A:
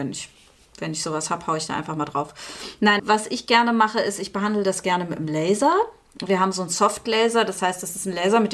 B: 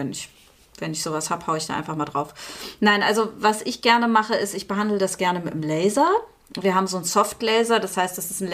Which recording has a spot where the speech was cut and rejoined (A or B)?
A